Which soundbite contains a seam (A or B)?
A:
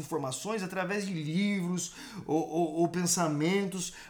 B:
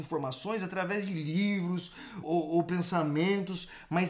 B